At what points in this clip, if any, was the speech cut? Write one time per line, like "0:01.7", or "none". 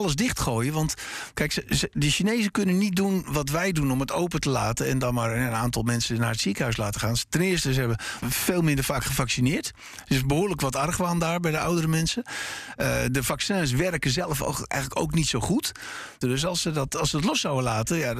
0:08.2
0:16.2